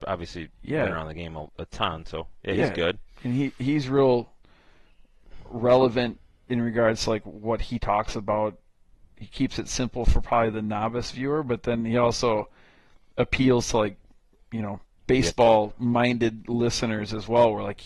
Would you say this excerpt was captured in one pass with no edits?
yes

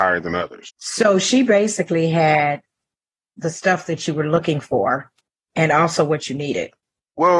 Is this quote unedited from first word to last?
yes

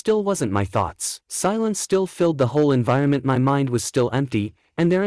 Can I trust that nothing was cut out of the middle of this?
no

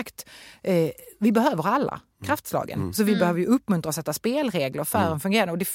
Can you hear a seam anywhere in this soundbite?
no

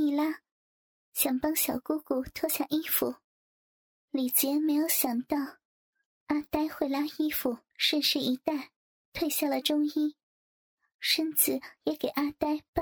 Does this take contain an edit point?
yes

